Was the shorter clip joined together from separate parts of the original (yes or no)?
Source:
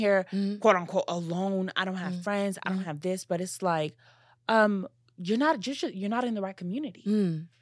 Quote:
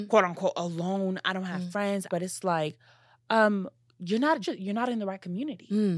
yes